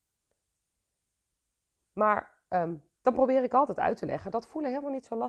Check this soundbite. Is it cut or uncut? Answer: uncut